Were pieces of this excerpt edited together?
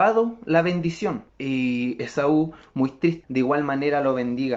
yes; 2 cuts; at 1.3 s, 3.2 s

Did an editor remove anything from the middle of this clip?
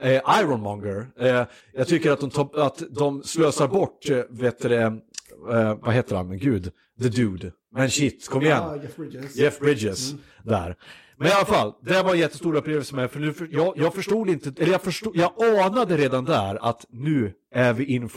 no; 0 cuts

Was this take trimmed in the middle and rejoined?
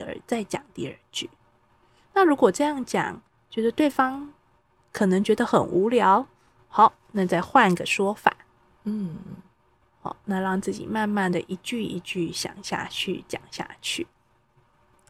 no; 0 cuts

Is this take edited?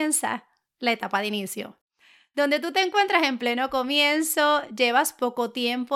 no; 0 cuts

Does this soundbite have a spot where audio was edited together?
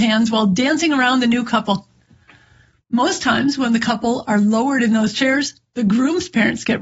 no; 0 cuts

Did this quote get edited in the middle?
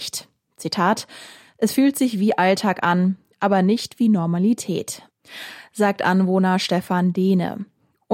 no; 0 cuts

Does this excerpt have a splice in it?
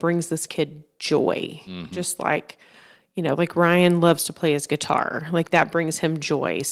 no; 0 cuts

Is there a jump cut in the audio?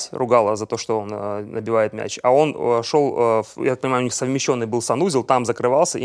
no; 0 cuts

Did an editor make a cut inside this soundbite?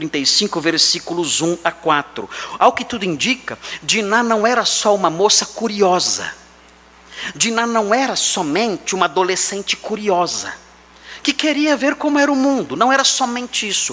no; 0 cuts

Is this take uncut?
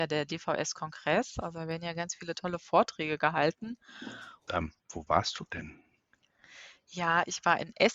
no; 1 cut; at 4.5 s

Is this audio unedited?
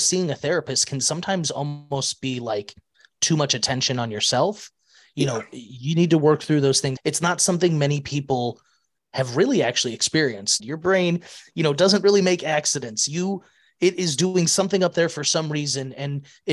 no; 2 cuts; at 7.0 s, 10.6 s

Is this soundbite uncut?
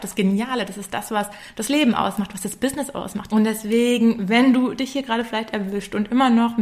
no; 1 cut; at 3.3 s

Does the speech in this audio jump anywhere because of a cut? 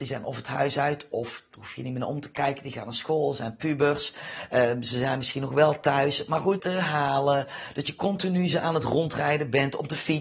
yes; 1 cut; at 6.6 s

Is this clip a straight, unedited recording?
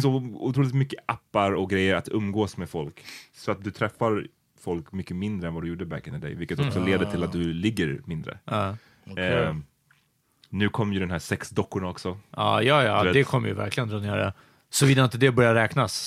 yes; 0 cuts

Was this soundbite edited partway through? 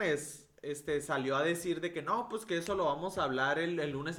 no; 0 cuts

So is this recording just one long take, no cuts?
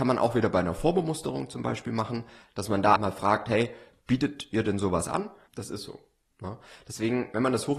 no; 2 cuts; at 3.0 s, 5.5 s

